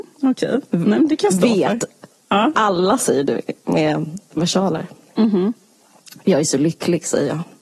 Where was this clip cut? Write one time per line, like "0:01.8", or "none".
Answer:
0:02.5